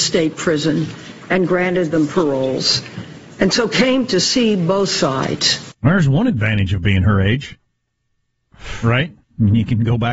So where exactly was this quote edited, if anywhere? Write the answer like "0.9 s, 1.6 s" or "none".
9.2 s